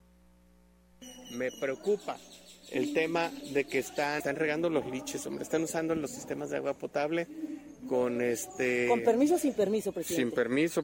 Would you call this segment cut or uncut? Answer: uncut